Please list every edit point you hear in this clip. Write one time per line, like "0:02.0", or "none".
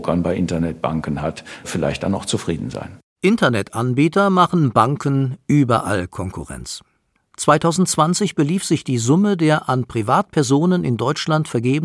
0:07.2